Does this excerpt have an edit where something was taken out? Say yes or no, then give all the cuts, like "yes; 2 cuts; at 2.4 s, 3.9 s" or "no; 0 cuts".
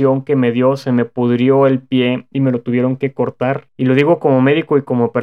yes; 1 cut; at 3.7 s